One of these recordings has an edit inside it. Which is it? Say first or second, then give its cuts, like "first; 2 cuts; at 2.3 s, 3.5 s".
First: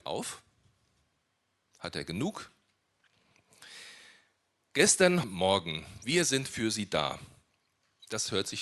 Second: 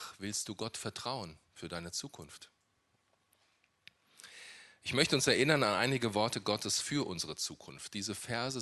first; 1 cut; at 5.2 s